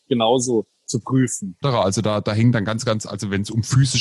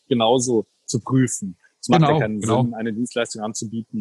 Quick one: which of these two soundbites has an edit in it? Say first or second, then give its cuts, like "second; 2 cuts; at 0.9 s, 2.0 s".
first; 1 cut; at 1.6 s